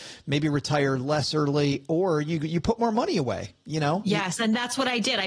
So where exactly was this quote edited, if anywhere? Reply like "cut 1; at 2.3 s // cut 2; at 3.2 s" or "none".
none